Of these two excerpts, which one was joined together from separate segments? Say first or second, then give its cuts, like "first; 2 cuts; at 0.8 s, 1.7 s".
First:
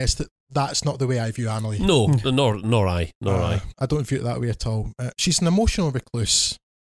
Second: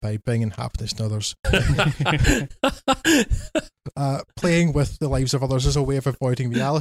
second; 1 cut; at 1.4 s